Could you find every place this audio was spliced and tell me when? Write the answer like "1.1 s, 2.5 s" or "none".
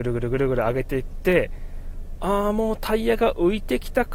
none